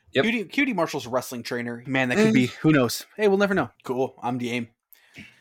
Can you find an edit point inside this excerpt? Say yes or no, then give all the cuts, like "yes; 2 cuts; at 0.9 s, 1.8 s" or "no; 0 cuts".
yes; 2 cuts; at 1.9 s, 3.7 s